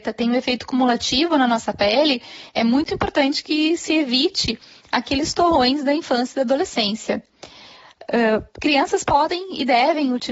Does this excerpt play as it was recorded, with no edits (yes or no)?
yes